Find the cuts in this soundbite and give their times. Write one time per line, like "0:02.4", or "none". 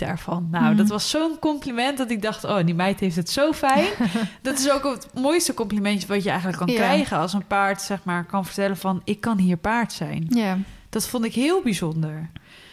none

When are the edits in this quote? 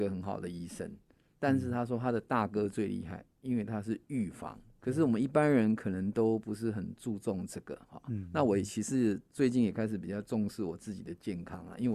0:04.8

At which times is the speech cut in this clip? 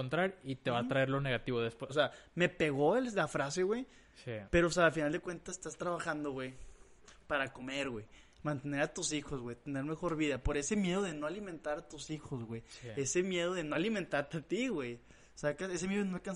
0:01.9

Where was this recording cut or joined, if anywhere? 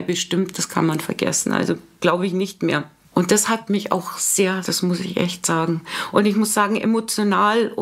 0:03.1
0:04.6

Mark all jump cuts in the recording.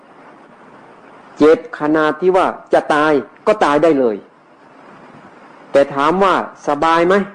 0:03.3

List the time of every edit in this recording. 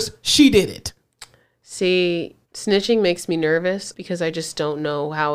0:02.4
0:03.9

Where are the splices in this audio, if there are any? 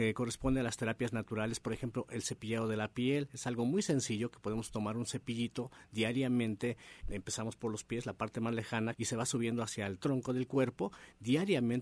0:07.0
0:08.9

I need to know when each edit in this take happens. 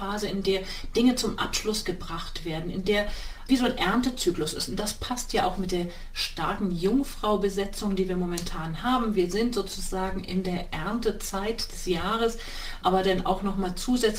0:03.5
0:12.8

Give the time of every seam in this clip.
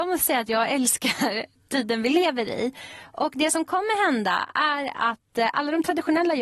none

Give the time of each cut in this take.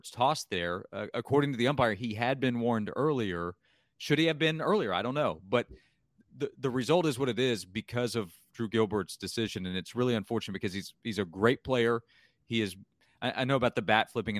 none

